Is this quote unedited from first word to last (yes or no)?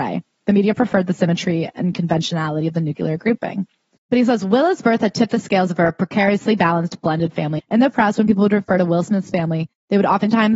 no